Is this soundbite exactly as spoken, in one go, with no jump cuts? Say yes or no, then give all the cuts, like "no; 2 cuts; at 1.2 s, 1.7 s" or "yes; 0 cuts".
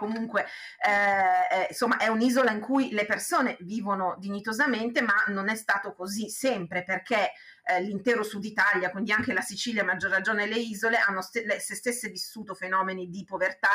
yes; 0 cuts